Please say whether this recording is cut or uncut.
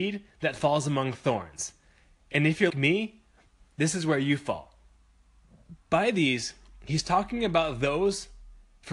cut